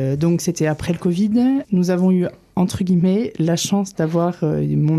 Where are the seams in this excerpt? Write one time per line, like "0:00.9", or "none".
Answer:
0:01.6